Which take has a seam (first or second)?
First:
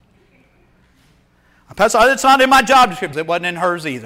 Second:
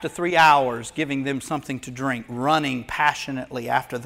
first